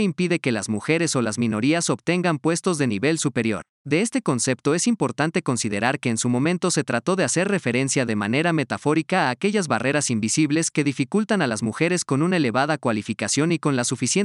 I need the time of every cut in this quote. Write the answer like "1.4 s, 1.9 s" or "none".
3.7 s